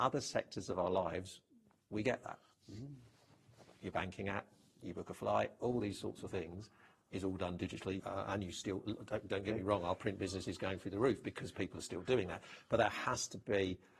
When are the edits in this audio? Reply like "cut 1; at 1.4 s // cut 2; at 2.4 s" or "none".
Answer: cut 1; at 8.0 s

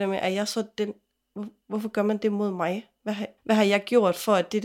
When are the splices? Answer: cut 1; at 3.4 s

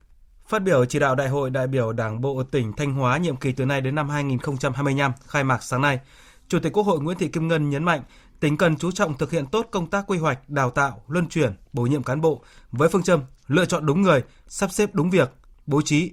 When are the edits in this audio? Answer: none

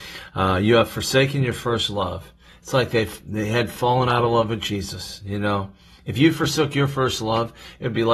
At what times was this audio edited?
none

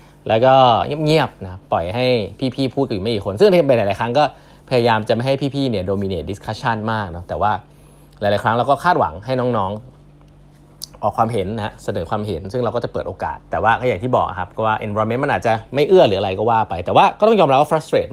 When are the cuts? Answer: cut 1; at 13.4 s

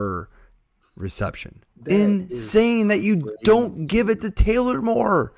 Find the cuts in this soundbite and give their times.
cut 1; at 1.7 s

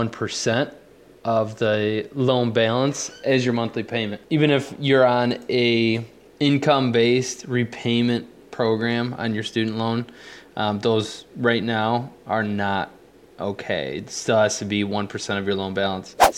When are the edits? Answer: none

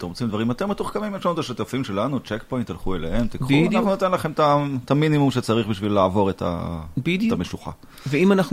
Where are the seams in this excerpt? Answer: none

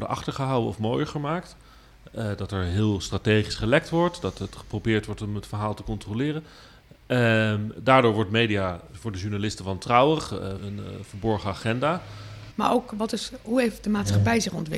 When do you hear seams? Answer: cut 1; at 8.9 s // cut 2; at 10.6 s // cut 3; at 12.5 s

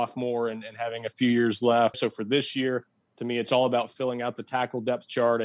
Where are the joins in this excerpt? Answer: cut 1; at 1.9 s

